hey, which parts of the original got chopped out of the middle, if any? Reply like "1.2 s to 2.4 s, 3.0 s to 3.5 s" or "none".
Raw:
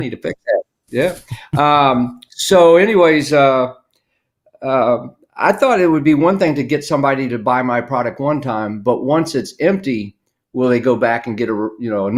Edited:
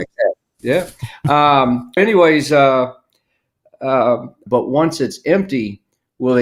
2.3 s to 2.8 s, 5.3 s to 8.8 s